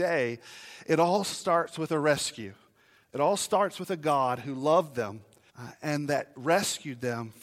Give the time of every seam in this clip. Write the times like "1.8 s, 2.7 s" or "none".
5.5 s